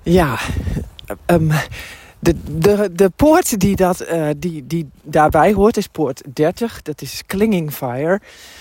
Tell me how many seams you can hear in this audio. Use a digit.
0